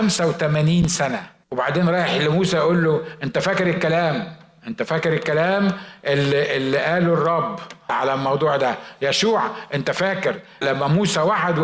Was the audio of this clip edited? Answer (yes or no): yes